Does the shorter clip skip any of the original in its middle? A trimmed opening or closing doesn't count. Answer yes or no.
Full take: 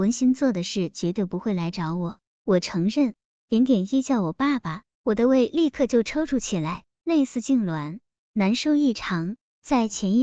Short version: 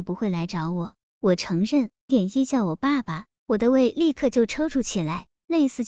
yes